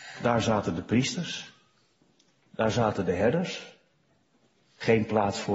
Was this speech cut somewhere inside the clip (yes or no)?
no